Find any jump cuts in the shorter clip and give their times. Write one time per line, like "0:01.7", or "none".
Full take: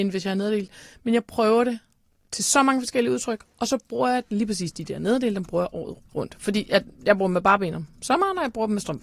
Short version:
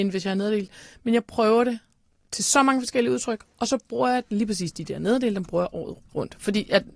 none